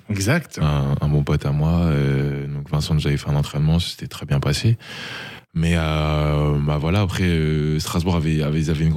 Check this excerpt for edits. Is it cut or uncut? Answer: uncut